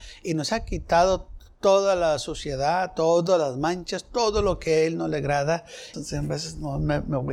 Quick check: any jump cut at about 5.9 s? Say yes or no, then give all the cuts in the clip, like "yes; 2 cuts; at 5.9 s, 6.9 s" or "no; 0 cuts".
yes; 1 cut; at 5.9 s